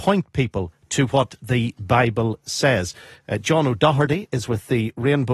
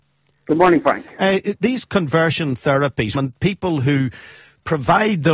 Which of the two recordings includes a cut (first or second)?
second